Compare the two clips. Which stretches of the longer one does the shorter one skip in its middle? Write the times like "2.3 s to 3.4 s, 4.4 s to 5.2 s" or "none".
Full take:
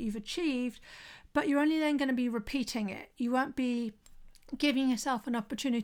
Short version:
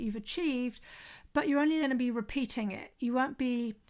1.8 s to 2.0 s